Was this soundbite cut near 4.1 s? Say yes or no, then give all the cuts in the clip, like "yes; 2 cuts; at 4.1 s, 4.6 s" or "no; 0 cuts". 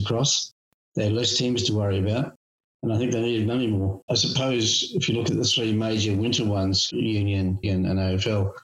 yes; 2 cuts; at 4.1 s, 7.6 s